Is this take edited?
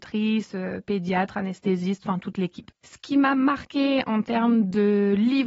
yes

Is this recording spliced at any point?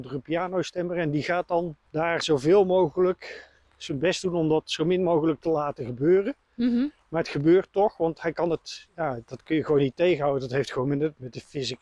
yes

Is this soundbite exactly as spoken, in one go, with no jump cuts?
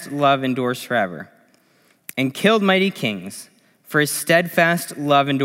yes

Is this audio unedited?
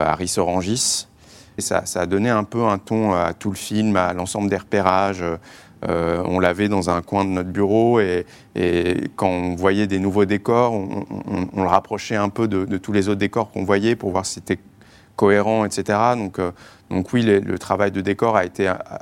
no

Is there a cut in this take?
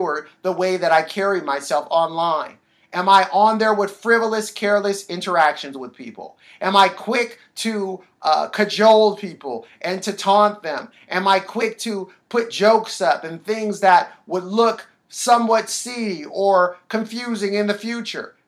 no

